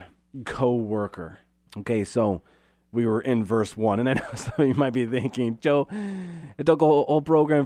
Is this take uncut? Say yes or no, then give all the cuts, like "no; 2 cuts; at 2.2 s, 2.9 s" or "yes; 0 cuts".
no; 2 cuts; at 1.7 s, 5.6 s